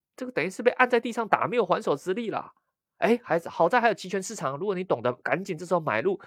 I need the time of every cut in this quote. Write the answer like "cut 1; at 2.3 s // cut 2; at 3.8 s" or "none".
none